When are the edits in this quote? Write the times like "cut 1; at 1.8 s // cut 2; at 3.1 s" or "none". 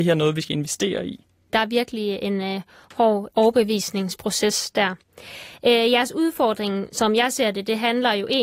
cut 1; at 1.5 s